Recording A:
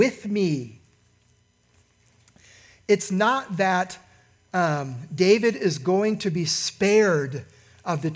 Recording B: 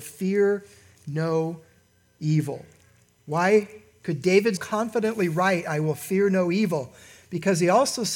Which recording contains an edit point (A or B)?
B